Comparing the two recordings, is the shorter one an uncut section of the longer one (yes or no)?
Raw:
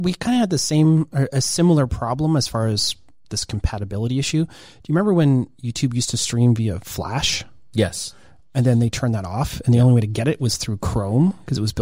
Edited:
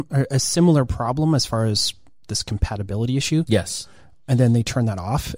no